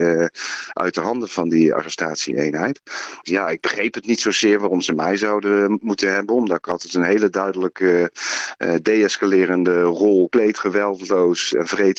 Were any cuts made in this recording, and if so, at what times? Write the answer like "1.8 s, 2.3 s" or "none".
3.2 s, 10.3 s